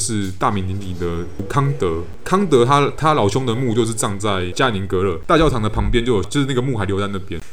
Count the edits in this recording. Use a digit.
0